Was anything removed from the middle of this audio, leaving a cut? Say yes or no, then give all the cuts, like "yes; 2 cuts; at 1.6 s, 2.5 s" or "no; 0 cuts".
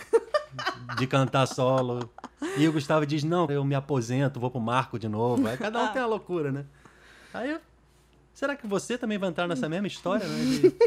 yes; 1 cut; at 3.5 s